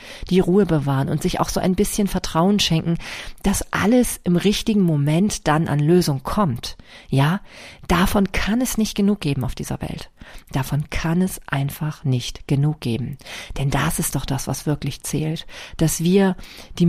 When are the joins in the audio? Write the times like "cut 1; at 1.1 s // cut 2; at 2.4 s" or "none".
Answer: none